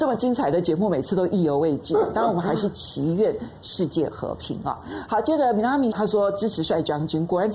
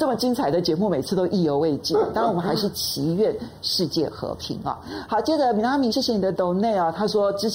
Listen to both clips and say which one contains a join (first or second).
first